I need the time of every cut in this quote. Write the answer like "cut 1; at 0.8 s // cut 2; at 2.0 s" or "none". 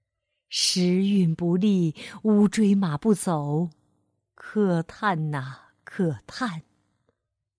none